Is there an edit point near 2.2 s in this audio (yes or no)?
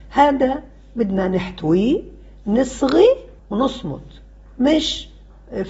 no